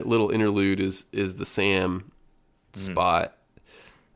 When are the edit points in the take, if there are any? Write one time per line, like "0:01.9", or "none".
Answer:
none